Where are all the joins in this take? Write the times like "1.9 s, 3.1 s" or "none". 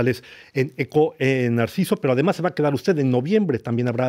none